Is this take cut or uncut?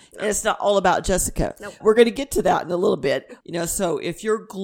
cut